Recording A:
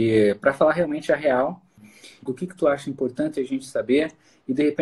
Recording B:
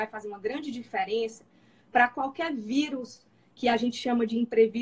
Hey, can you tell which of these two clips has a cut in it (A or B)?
A